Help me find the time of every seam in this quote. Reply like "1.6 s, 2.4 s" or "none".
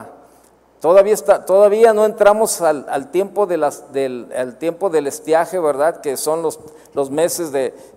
none